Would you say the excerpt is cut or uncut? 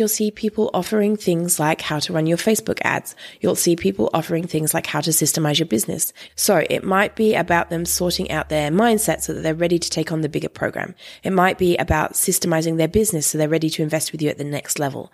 cut